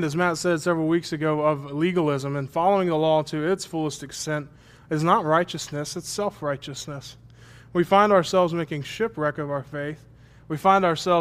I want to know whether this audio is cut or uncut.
uncut